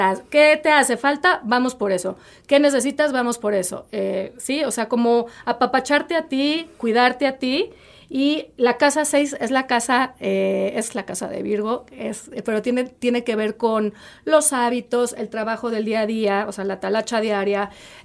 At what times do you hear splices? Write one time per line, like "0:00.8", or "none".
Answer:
none